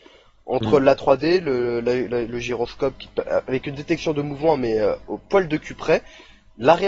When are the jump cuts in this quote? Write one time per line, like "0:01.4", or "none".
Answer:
none

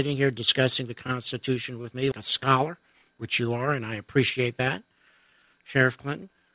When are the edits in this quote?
0:02.1

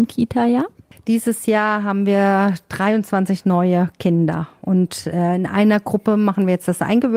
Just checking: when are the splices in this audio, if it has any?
none

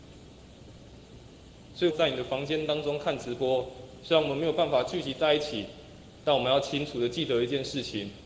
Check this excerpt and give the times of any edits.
0:01.9

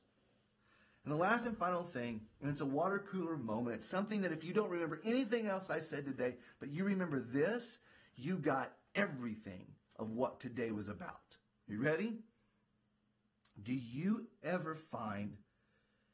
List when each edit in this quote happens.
none

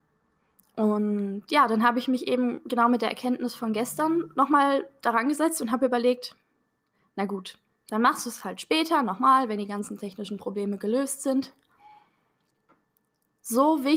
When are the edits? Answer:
none

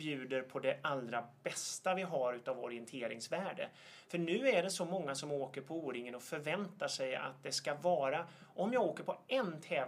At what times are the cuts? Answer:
none

